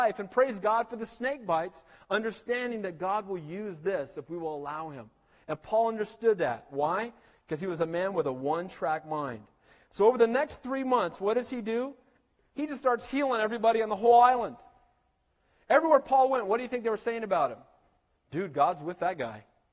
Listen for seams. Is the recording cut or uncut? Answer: uncut